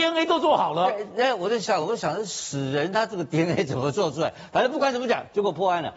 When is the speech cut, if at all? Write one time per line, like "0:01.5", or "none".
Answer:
none